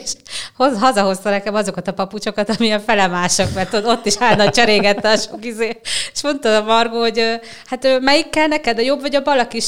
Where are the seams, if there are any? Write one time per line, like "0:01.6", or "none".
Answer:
none